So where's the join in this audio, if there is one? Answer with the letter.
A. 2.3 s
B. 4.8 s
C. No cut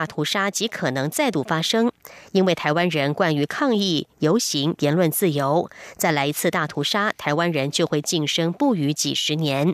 B